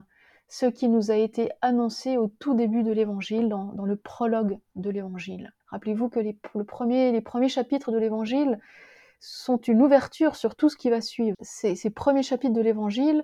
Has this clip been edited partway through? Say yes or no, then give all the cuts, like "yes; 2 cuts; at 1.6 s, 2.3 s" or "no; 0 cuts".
yes; 2 cuts; at 5.6 s, 11.3 s